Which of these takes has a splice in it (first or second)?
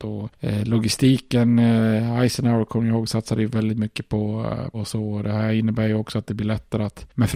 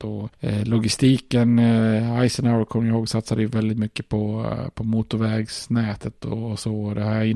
first